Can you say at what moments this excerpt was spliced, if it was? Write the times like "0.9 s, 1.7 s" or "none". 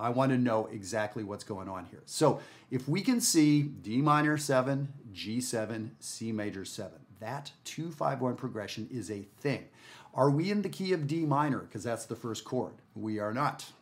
12.8 s